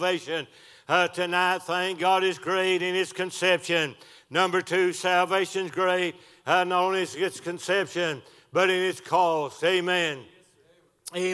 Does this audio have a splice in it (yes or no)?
no